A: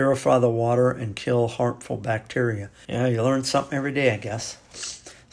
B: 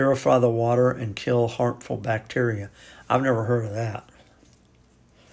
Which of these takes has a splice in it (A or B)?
A